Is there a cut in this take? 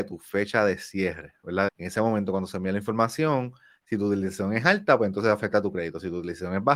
yes; 1 cut; at 1.7 s

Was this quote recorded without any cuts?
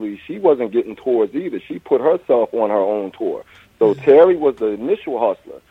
yes; 0 cuts

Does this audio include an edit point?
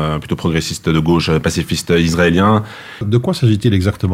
yes; 1 cut; at 3.0 s

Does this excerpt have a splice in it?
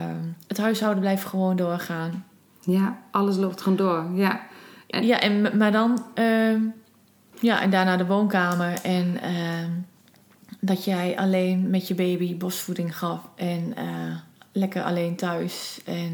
yes; 1 cut; at 7.3 s

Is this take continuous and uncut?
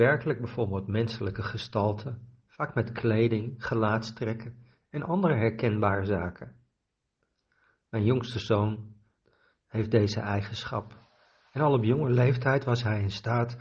yes; 0 cuts

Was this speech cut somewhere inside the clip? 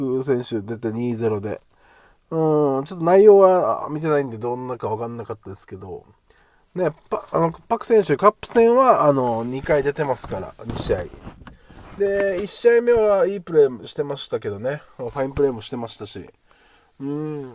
no; 0 cuts

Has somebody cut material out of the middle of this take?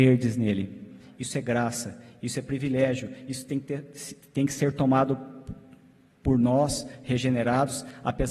no; 0 cuts

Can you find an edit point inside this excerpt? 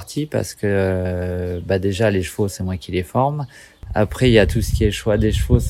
no; 0 cuts

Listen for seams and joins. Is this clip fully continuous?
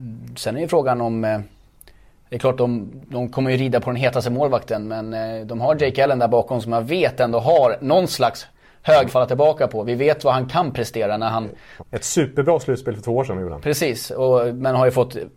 no; 3 cuts; at 2.6 s, 9.1 s, 11.8 s

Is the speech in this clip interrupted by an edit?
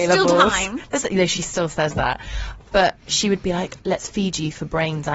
no; 0 cuts

